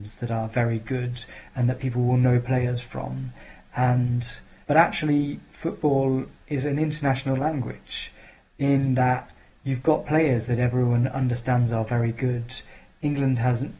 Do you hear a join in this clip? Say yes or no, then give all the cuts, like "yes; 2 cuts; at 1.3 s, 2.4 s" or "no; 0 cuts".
yes; 1 cut; at 4.6 s